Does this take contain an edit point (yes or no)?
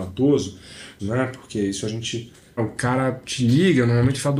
yes